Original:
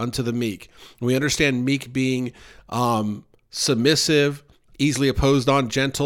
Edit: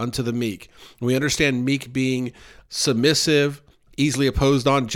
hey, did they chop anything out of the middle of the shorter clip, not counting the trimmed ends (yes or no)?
yes